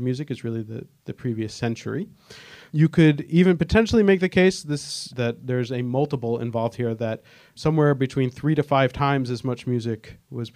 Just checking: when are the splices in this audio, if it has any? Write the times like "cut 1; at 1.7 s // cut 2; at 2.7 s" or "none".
cut 1; at 5.1 s